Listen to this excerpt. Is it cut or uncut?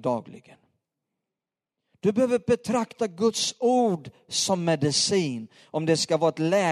uncut